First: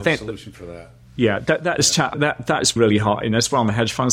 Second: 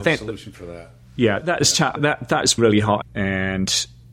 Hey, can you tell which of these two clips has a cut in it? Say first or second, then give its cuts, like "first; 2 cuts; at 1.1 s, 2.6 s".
second; 2 cuts; at 1.4 s, 3.0 s